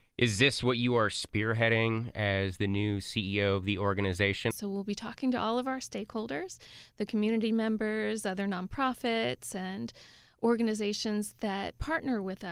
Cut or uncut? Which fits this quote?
cut